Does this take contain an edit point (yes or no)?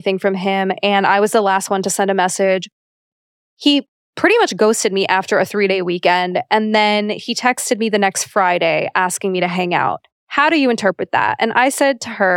no